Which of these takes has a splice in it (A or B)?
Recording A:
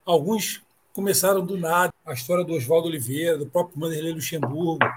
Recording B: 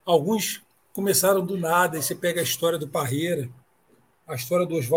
A